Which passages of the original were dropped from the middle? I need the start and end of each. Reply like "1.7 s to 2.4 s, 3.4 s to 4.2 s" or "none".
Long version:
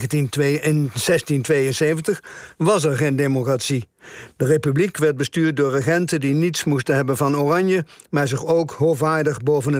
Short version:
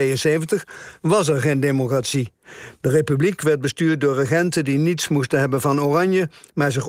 none